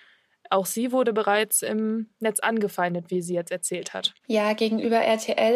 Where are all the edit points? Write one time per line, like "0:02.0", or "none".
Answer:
0:04.2